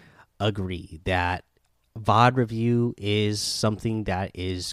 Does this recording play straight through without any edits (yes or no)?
no